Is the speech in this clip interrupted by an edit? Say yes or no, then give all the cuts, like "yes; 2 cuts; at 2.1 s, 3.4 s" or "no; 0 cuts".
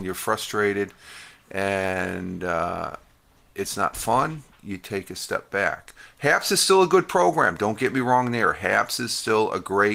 no; 0 cuts